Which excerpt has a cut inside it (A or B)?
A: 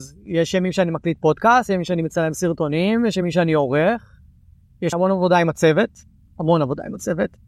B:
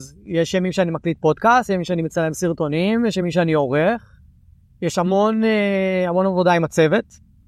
A